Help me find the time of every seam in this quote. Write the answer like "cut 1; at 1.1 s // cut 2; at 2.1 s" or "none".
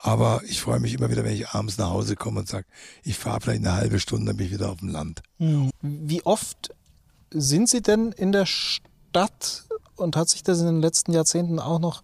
cut 1; at 5.7 s